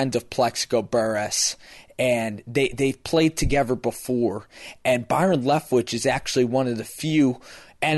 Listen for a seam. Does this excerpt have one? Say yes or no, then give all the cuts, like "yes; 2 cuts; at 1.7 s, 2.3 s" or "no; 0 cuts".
no; 0 cuts